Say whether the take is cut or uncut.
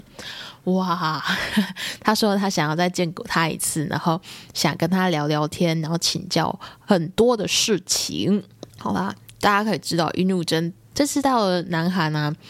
cut